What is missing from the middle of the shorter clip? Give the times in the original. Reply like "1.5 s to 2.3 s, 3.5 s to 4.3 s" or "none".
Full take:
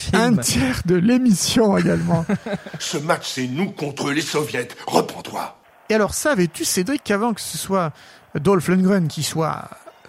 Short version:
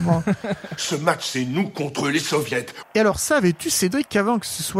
4.8 s to 5.8 s